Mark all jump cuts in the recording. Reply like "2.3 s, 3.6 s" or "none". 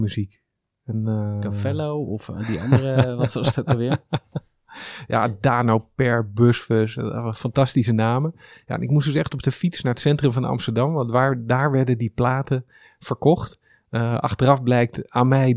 none